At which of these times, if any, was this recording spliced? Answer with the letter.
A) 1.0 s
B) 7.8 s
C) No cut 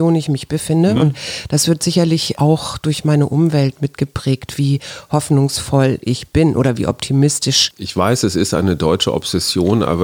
C